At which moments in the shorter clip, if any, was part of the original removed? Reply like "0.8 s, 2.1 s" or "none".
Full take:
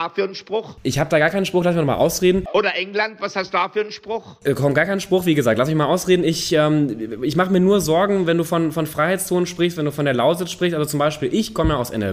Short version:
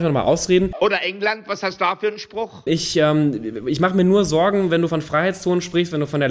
2.7 s, 4.9 s